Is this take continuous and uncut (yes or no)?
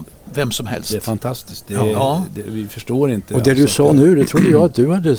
yes